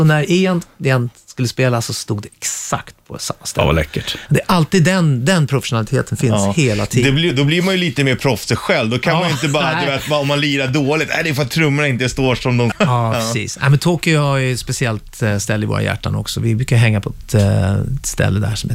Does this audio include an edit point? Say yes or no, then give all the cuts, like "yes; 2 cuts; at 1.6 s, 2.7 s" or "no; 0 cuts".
yes; 1 cut; at 12.7 s